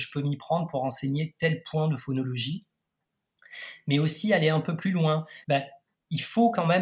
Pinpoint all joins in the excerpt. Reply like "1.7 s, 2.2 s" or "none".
5.4 s